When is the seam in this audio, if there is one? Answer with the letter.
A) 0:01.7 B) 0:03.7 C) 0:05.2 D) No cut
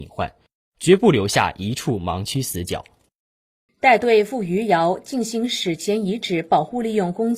B